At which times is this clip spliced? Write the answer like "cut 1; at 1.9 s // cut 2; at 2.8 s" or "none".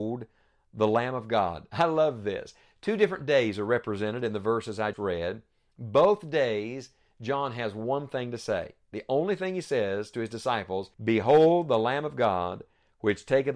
cut 1; at 4.9 s // cut 2; at 10.9 s